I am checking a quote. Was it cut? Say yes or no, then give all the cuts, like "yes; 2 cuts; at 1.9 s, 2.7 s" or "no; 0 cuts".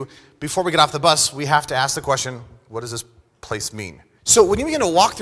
yes; 1 cut; at 4.2 s